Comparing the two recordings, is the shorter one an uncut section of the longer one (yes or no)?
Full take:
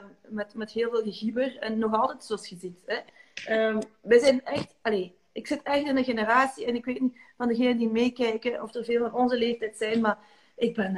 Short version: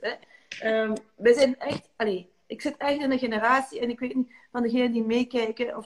yes